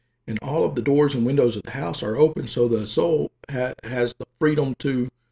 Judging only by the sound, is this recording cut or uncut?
uncut